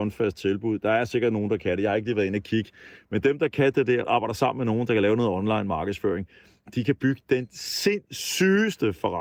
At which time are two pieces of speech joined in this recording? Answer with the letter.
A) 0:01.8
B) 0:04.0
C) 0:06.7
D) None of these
B